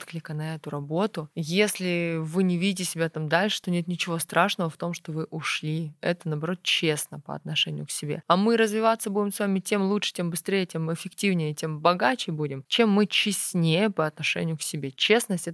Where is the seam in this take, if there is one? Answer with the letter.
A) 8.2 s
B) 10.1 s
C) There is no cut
C